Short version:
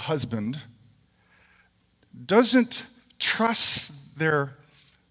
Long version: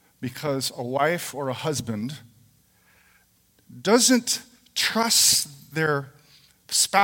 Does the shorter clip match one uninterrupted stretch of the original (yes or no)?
yes